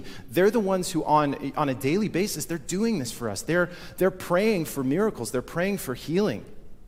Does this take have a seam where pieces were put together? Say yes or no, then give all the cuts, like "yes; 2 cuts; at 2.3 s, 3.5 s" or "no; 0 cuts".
no; 0 cuts